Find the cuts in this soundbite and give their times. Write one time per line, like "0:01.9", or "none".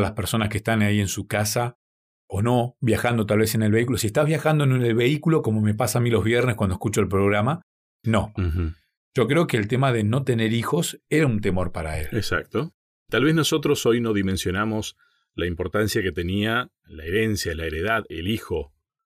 0:08.4